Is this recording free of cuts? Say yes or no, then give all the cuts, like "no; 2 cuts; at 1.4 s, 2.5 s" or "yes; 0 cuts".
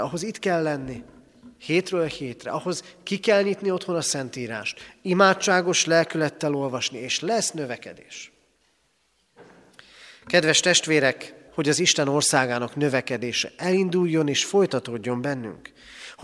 no; 1 cut; at 11.5 s